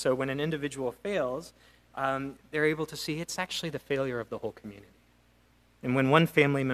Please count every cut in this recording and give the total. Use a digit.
0